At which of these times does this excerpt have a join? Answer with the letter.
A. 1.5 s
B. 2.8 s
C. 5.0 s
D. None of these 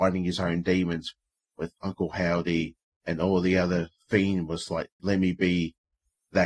C